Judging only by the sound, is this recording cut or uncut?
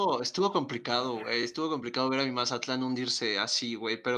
uncut